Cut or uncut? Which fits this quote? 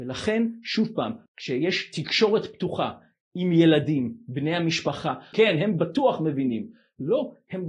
cut